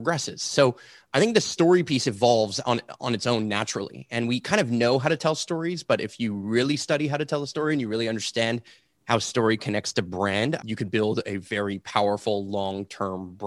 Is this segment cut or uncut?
cut